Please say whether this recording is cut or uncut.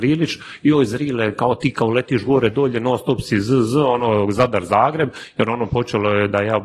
uncut